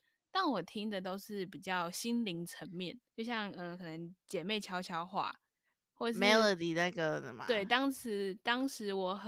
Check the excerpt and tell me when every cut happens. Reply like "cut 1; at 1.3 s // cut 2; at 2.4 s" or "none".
cut 1; at 3.1 s